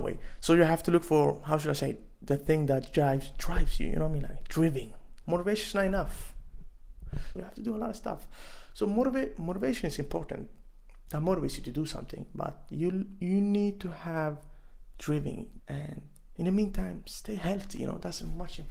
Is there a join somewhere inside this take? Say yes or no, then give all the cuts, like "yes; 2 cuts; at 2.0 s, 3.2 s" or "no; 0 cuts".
yes; 3 cuts; at 5.2 s, 7.4 s, 15.6 s